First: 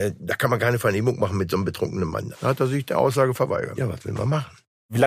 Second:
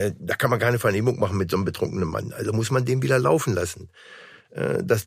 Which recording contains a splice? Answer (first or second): first